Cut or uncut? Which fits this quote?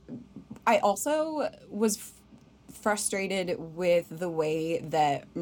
uncut